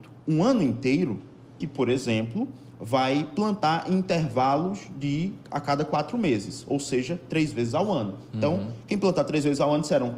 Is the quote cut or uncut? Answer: cut